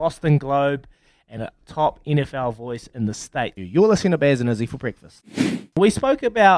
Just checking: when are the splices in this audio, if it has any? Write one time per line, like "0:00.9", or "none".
0:03.6